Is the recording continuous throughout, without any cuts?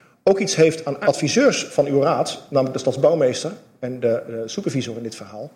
no; 1 cut; at 1.0 s

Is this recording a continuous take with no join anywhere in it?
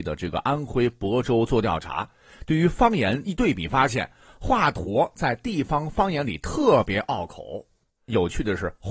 yes; 0 cuts

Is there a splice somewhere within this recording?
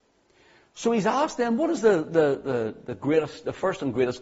no; 0 cuts

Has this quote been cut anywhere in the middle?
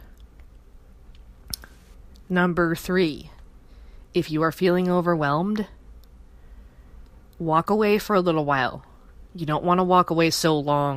no; 0 cuts

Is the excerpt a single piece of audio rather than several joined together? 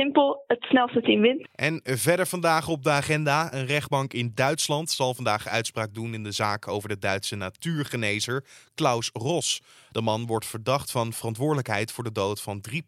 no; 1 cut; at 1.4 s

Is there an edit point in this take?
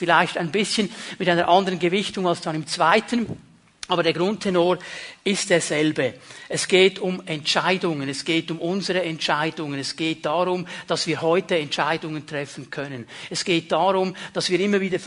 no; 0 cuts

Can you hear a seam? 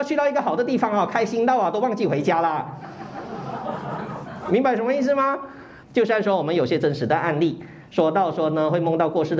yes; 1 cut; at 5.8 s

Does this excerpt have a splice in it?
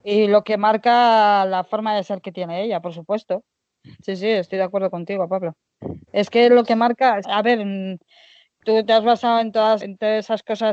yes; 3 cuts; at 6.1 s, 7.2 s, 9.8 s

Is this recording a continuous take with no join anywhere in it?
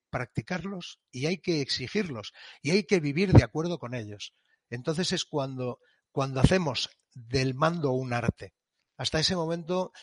no; 1 cut; at 4.7 s

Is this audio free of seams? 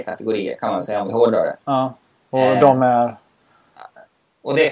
yes; 0 cuts

